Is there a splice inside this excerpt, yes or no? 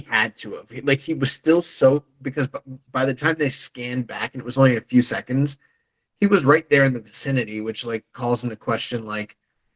no